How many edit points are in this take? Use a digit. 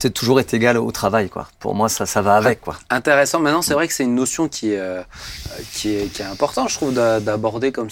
0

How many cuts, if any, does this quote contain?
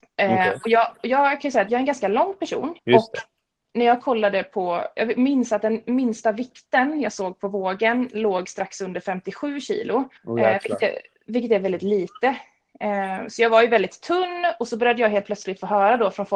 2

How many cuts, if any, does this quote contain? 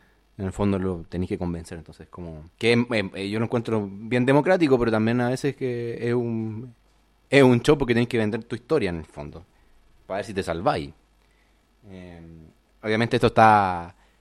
1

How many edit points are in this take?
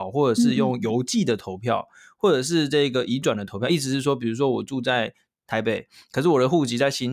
0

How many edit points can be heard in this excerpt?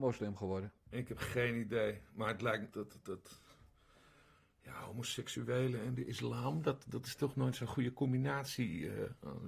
1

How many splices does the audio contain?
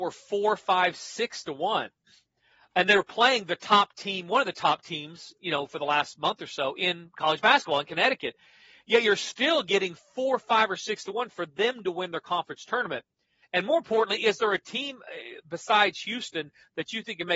1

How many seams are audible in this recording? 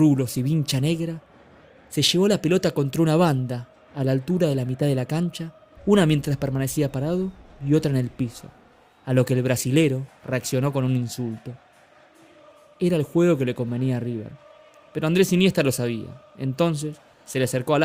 2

